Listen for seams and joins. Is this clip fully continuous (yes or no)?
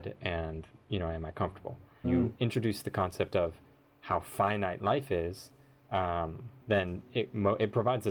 no